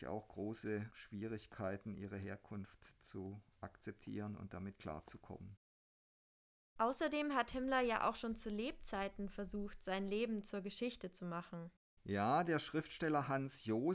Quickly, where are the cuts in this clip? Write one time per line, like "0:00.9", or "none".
none